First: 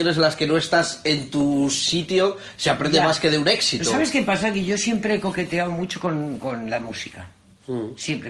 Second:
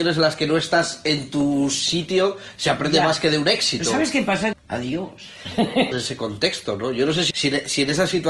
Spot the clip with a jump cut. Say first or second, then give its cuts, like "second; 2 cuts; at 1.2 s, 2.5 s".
second; 3 cuts; at 4.5 s, 5.9 s, 7.3 s